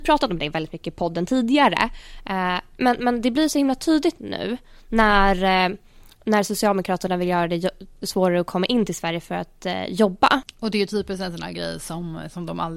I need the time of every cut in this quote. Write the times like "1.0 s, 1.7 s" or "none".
none